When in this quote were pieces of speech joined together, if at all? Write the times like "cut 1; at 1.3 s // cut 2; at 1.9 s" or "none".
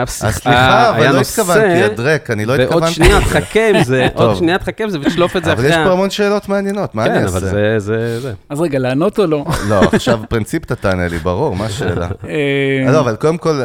none